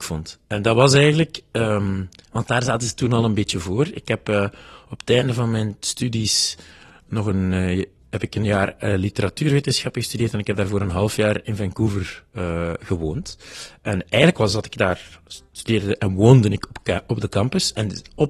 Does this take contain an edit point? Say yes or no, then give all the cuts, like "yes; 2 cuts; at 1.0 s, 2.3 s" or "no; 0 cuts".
no; 0 cuts